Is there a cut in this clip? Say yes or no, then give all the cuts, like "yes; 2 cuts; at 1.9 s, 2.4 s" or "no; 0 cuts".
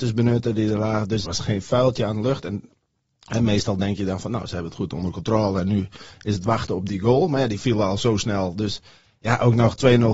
yes; 1 cut; at 1.2 s